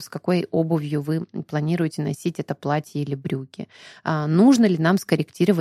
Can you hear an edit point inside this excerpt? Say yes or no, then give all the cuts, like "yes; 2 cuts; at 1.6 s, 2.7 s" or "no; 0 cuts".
no; 0 cuts